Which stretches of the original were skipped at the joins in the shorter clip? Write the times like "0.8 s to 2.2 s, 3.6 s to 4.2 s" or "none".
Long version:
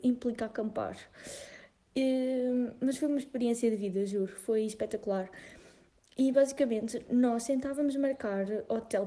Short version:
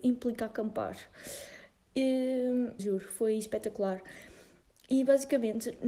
2.8 s to 4.1 s